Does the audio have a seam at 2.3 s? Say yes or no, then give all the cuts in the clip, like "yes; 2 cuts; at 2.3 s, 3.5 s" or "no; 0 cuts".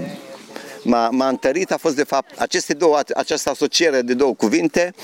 yes; 1 cut; at 2.3 s